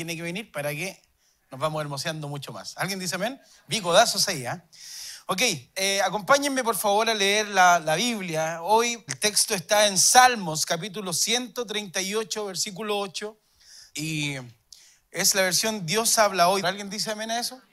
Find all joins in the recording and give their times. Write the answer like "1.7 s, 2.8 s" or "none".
9.1 s, 13.9 s, 16.6 s